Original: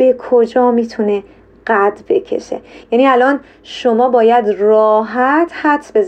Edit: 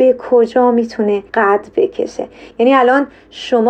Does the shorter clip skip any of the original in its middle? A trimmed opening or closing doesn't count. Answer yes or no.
yes